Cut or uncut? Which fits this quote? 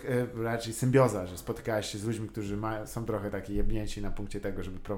uncut